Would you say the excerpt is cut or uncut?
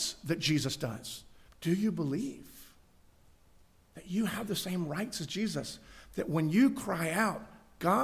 cut